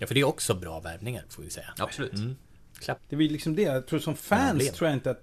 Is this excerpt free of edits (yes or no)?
no